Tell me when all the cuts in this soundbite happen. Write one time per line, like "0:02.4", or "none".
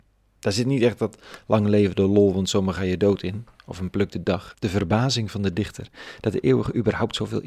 0:04.5

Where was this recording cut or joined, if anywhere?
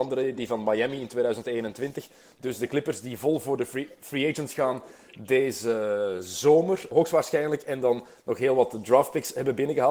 none

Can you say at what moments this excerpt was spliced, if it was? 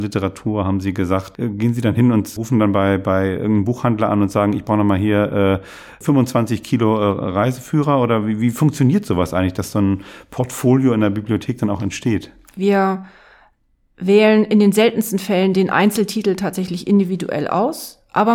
0:12.5

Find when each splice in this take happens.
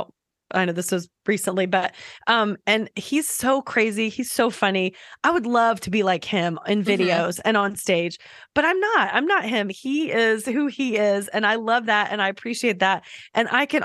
none

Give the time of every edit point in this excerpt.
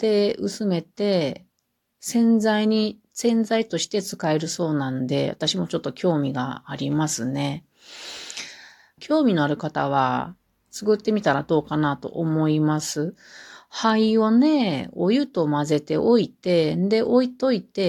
0:09.0

